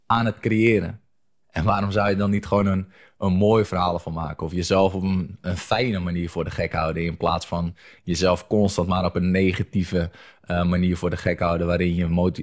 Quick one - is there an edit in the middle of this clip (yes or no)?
no